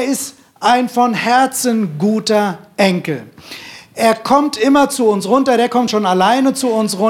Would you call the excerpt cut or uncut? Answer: uncut